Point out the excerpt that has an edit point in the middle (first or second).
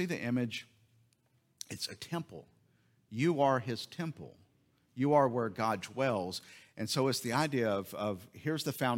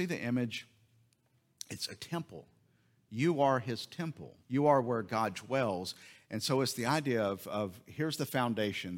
second